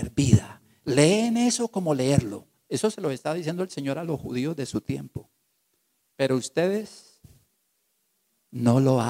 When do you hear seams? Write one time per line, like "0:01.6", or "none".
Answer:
0:06.0